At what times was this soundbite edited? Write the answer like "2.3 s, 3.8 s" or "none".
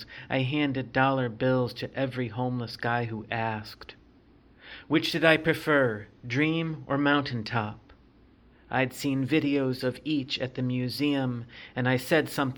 none